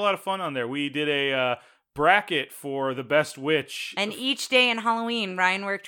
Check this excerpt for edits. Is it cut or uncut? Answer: uncut